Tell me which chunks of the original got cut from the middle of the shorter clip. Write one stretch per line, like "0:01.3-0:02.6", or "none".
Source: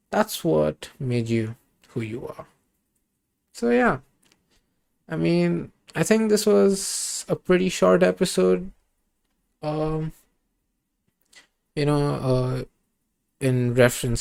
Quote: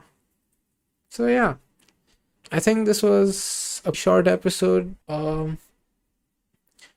0:04.8-0:05.8
0:07.4-0:07.7
0:08.8-0:09.6